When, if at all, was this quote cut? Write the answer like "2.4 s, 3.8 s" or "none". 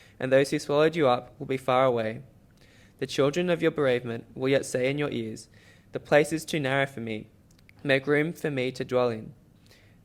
none